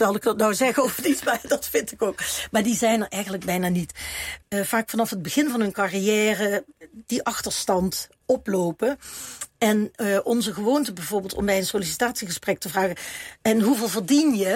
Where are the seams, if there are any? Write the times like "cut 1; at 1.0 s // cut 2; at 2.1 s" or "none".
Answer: cut 1; at 4.4 s